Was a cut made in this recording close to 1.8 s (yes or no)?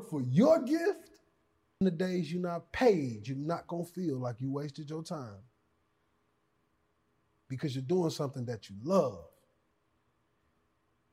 yes